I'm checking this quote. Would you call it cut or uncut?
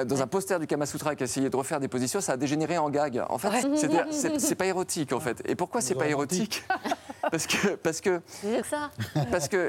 cut